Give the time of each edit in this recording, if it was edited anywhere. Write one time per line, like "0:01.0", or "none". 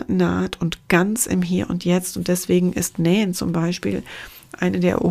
none